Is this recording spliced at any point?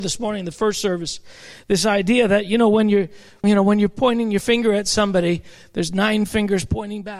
yes; 1 cut; at 3.4 s

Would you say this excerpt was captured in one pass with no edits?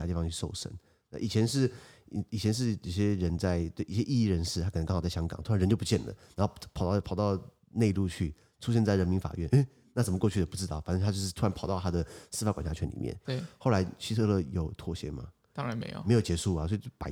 no; 1 cut; at 13.2 s

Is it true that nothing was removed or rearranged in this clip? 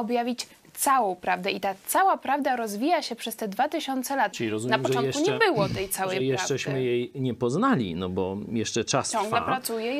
no; 1 cut; at 4.3 s

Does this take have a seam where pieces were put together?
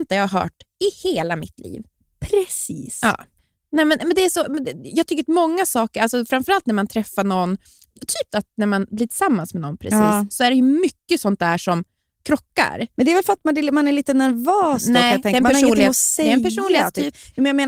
yes; 1 cut; at 8.3 s

